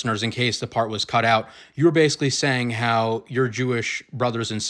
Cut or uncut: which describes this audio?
uncut